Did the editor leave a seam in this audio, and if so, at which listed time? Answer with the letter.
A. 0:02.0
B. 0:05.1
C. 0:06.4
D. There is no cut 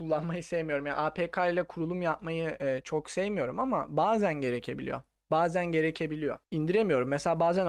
D